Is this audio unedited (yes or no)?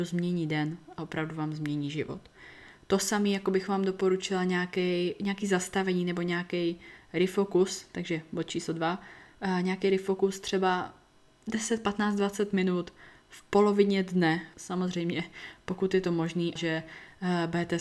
no